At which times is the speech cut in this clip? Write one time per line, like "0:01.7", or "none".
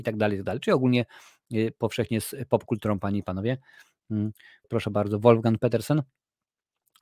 0:04.6